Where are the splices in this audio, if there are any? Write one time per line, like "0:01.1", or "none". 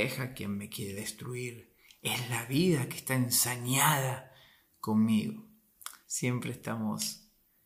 0:06.0